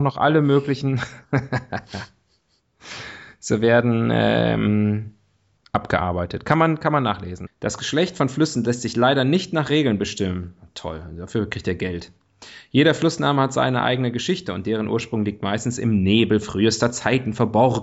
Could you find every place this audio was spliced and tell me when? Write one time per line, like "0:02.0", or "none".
0:05.6
0:07.5